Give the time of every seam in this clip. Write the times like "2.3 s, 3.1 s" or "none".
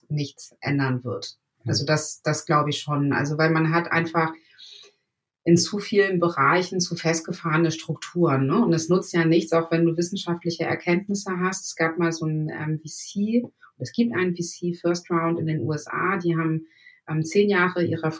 none